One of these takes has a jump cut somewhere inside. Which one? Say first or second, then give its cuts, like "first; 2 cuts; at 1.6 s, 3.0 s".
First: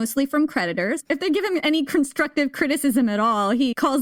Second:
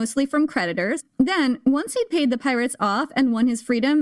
first; 1 cut; at 1.0 s